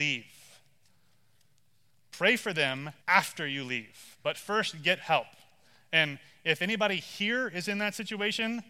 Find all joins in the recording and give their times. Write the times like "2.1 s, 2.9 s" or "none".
3.0 s